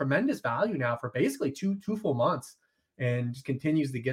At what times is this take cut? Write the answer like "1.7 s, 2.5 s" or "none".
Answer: none